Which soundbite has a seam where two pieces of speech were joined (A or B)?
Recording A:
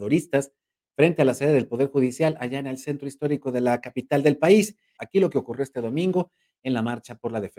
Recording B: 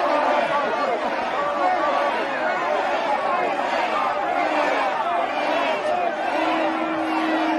A